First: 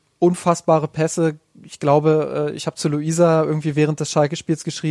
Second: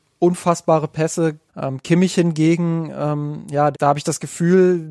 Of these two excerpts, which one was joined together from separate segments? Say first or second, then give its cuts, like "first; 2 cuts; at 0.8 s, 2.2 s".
second; 2 cuts; at 1.5 s, 3.7 s